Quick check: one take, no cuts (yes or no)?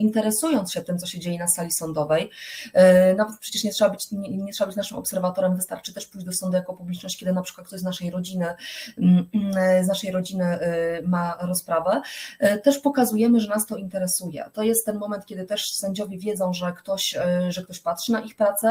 yes